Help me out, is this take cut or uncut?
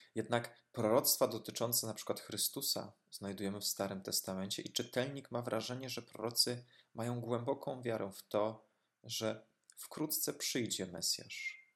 uncut